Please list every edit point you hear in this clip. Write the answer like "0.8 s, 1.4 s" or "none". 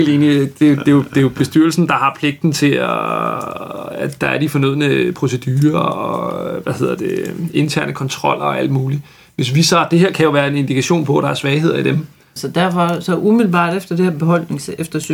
12.4 s